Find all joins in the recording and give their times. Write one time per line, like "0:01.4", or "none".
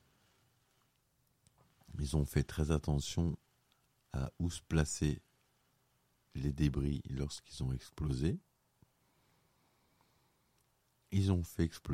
none